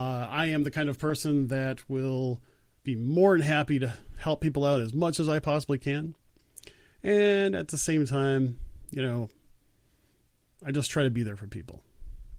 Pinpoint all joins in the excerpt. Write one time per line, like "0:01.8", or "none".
none

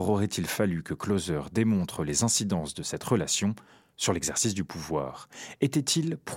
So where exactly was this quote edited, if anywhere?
none

